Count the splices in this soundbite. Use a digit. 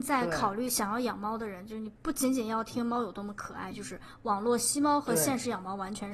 2